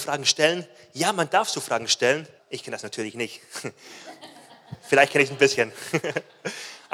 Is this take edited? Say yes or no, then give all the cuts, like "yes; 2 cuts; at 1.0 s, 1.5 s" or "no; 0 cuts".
yes; 1 cut; at 2.4 s